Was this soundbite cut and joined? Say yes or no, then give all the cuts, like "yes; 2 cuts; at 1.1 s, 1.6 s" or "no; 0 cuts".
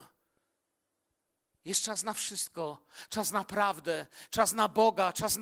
no; 0 cuts